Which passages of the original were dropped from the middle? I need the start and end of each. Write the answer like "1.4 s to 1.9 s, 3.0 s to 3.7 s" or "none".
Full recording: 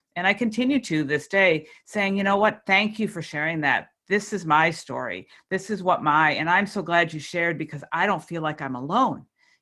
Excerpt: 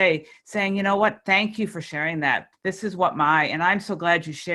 3.9 s to 5.4 s